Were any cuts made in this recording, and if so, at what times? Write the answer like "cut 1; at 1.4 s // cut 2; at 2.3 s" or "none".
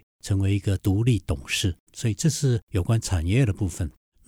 cut 1; at 1.9 s